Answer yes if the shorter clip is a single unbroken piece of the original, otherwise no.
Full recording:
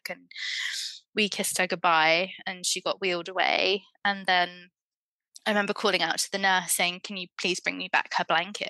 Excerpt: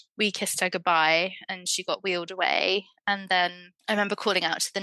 no